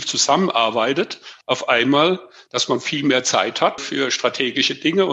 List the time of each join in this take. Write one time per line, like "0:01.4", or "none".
0:01.4
0:03.8